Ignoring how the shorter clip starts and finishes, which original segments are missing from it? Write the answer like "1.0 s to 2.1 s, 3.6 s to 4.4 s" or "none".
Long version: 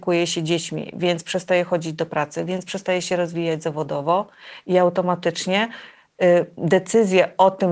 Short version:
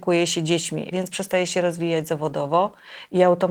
0.9 s to 2.5 s